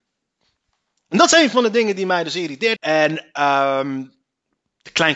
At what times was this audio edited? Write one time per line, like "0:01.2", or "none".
0:02.8

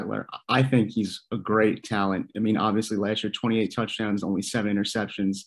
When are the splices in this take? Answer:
none

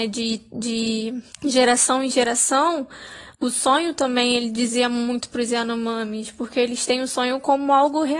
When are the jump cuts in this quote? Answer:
0:01.3

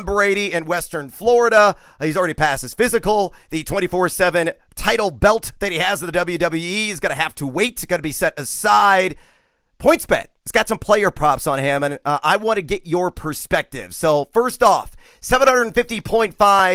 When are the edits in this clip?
none

